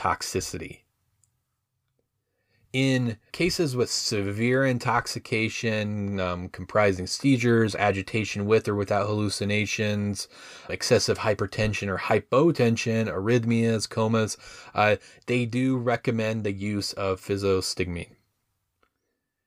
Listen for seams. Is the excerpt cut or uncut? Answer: cut